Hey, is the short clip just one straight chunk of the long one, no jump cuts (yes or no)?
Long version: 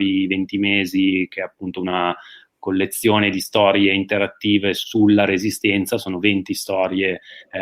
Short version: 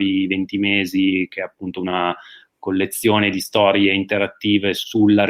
yes